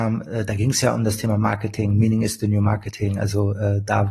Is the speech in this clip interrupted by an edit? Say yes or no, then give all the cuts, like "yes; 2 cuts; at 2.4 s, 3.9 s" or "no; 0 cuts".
no; 0 cuts